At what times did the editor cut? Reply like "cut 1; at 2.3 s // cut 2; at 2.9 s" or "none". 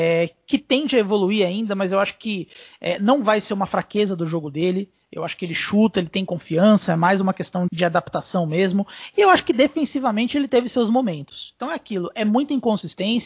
cut 1; at 7.7 s